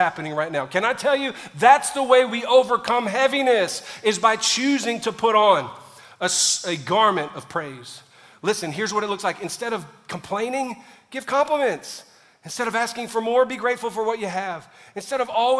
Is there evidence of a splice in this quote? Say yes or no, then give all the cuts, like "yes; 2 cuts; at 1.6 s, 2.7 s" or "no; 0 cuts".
no; 0 cuts